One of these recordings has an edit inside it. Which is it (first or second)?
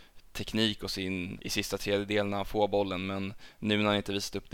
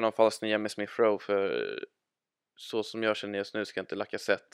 first